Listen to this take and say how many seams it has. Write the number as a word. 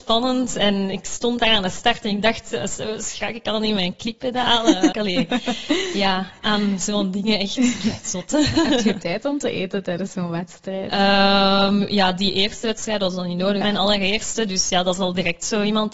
two